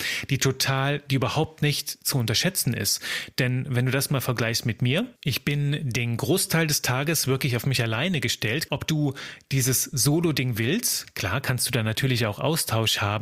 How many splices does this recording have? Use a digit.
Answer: 2